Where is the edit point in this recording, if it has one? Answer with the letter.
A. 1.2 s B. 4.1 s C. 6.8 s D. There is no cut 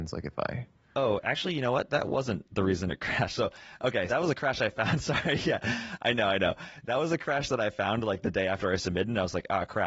B